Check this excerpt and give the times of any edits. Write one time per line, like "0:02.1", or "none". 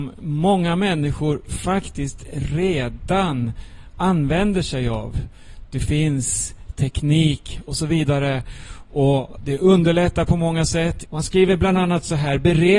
0:11.1